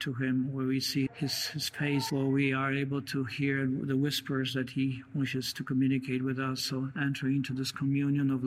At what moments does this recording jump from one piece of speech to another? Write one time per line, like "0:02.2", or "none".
0:01.1
0:02.1